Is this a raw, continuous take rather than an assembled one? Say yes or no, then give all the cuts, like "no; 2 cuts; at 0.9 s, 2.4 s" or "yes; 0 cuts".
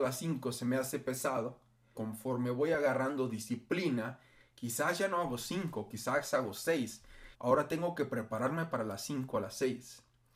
no; 2 cuts; at 2.0 s, 7.3 s